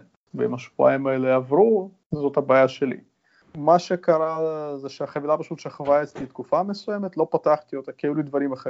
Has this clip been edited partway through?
no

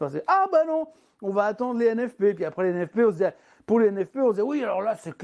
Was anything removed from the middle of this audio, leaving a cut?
no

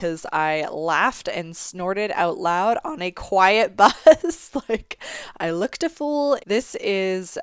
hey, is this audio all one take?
no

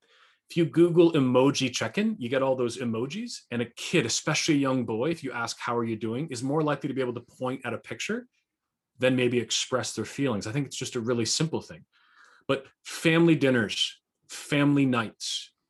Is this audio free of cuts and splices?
yes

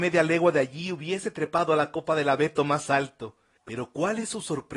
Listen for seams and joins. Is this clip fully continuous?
no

